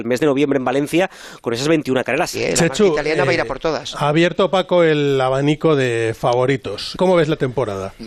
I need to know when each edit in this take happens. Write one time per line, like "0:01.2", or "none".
0:02.3

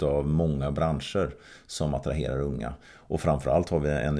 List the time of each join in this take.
none

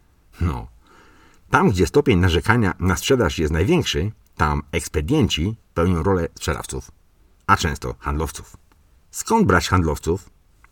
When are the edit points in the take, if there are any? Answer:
none

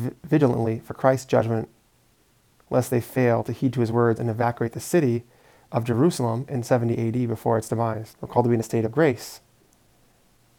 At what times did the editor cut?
0:08.1

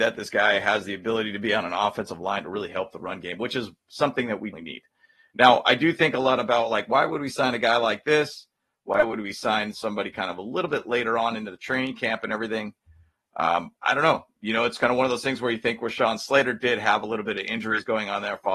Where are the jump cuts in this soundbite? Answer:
0:04.5

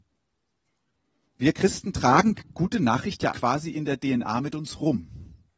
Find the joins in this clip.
0:01.3
0:03.3

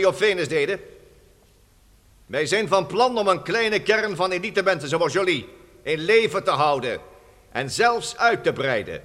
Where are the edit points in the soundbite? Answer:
none

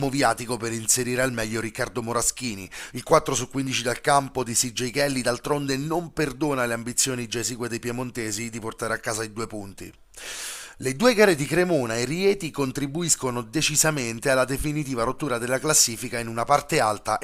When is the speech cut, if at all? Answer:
0:02.9

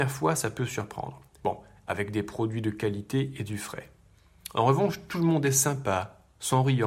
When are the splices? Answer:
0:01.4

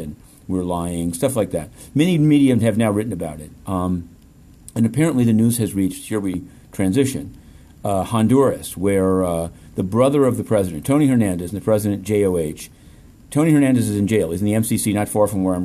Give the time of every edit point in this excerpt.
none

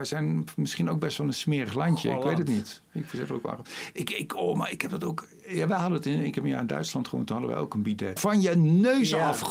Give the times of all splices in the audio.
0:05.4
0:08.2

